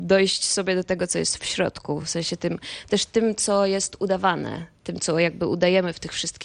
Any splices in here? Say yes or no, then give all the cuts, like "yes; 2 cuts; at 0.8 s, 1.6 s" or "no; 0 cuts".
no; 0 cuts